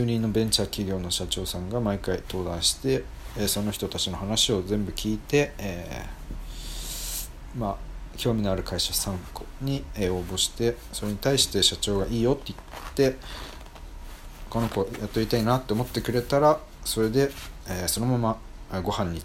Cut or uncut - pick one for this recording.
uncut